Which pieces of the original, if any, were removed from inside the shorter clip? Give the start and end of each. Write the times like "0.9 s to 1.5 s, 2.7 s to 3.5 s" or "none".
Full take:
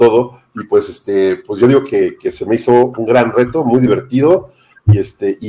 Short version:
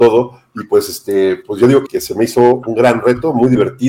1.9 s to 2.2 s